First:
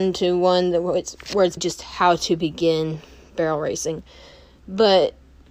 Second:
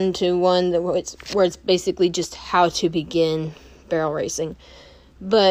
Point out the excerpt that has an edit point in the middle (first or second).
first